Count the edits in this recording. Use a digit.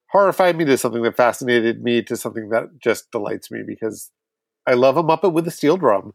0